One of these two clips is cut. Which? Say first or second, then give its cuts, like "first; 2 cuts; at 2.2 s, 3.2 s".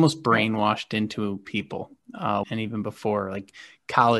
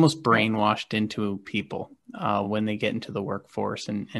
first; 1 cut; at 2.4 s